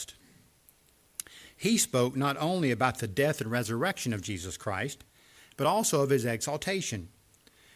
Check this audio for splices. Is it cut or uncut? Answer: uncut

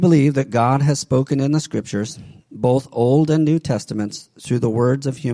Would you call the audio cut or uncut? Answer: uncut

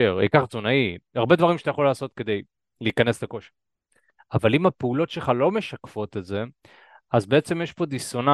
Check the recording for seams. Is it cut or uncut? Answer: uncut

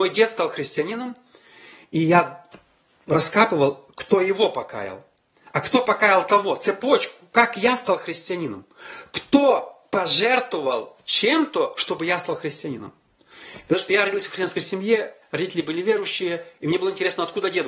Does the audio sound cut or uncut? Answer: uncut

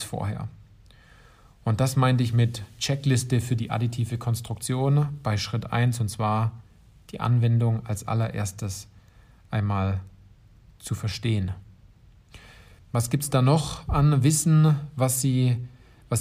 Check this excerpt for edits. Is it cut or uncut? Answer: cut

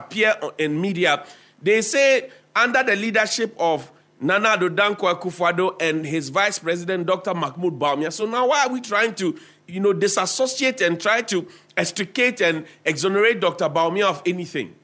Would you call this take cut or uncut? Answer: uncut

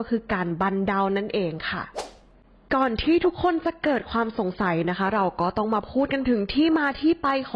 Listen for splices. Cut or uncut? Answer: uncut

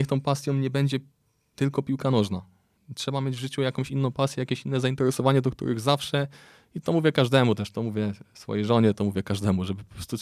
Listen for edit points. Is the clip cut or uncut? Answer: uncut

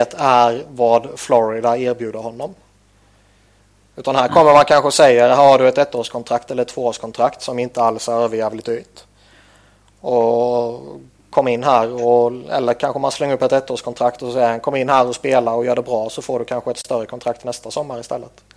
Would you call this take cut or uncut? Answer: uncut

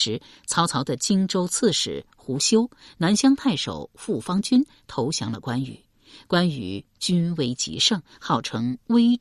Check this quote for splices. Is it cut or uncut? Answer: uncut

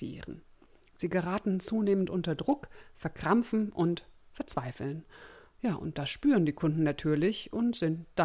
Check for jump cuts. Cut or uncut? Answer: uncut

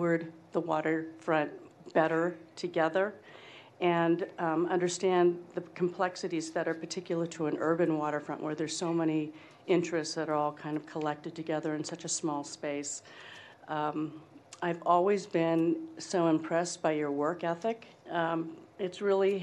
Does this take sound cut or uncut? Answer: cut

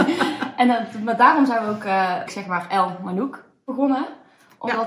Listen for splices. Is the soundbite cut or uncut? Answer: cut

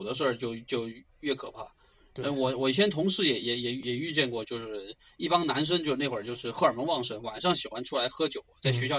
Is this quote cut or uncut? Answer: cut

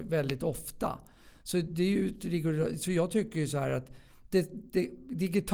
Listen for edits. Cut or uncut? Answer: uncut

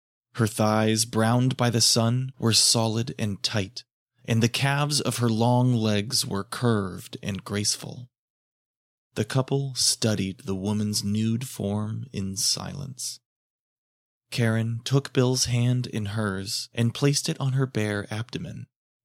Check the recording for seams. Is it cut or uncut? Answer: uncut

